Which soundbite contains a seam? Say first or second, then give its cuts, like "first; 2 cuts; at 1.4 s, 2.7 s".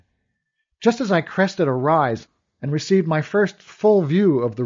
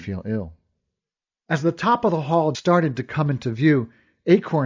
second; 1 cut; at 2.5 s